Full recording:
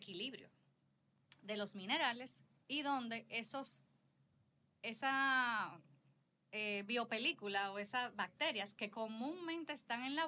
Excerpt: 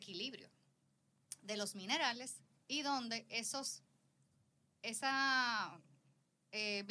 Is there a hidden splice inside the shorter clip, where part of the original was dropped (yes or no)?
no